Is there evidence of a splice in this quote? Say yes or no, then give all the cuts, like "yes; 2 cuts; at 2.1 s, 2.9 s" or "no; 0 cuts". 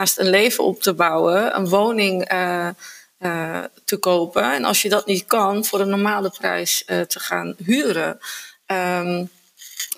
yes; 1 cut; at 8.6 s